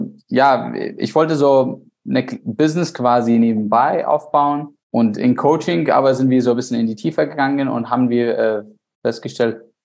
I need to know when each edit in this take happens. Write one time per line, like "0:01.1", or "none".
none